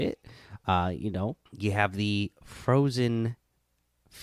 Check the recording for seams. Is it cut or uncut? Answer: cut